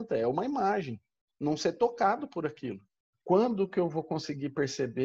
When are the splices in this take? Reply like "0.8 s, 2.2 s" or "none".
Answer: 1.3 s, 3.2 s